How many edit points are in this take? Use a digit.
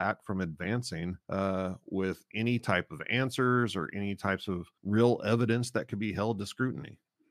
2